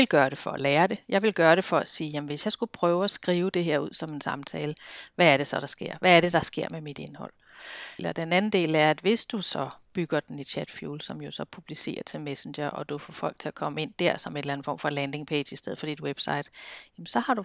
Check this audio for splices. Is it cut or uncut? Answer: cut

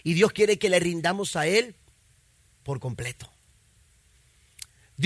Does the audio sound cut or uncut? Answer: uncut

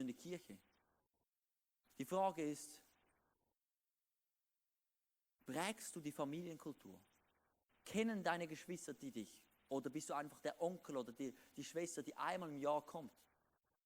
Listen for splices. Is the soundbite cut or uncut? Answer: uncut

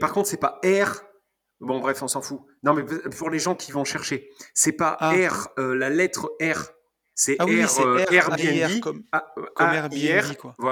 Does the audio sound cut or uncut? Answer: uncut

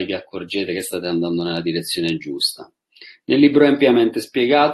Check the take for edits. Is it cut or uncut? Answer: uncut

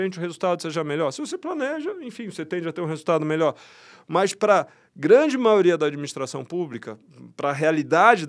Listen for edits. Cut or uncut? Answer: uncut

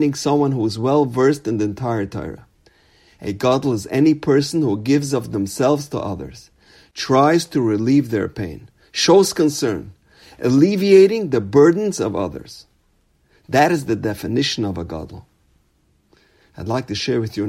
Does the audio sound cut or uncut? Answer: uncut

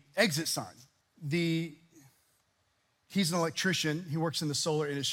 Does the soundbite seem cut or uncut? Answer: cut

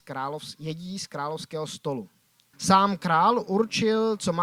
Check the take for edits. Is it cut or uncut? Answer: cut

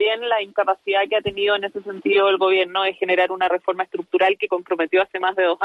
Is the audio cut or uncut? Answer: uncut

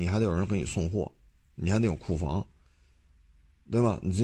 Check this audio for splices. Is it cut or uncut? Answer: uncut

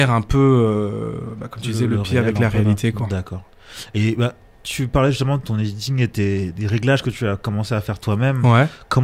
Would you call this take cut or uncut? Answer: cut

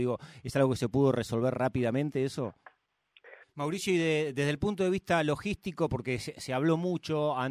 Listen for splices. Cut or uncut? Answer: cut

